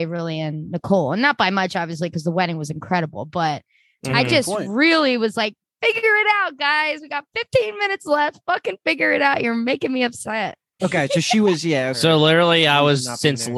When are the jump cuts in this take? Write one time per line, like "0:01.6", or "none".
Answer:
0:10.8
0:11.9